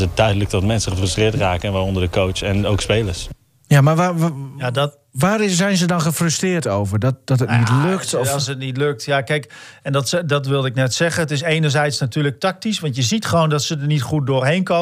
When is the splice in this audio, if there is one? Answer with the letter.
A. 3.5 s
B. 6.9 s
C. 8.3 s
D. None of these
D